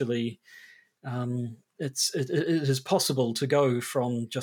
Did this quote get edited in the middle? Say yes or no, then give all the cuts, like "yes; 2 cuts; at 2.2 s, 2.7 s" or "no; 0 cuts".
no; 0 cuts